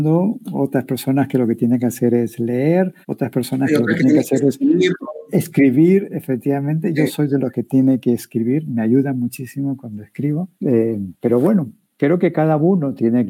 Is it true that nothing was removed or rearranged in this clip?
no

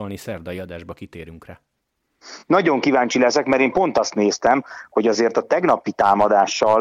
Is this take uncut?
yes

